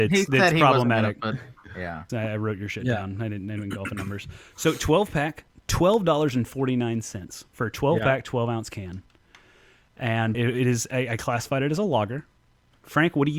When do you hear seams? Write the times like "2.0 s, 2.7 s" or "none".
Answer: 2.1 s, 10.3 s